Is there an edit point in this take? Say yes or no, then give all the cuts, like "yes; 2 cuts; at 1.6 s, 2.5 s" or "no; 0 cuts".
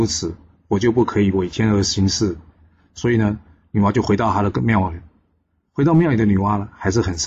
no; 0 cuts